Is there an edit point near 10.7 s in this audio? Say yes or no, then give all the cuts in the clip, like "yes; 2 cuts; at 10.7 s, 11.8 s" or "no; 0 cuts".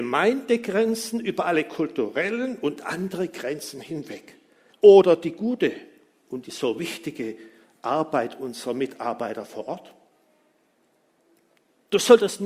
no; 1 cut; at 4.7 s